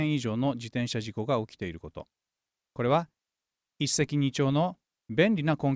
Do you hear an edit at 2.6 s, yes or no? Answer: yes